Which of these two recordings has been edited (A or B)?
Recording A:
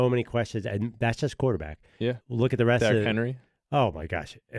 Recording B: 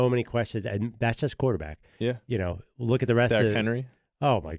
A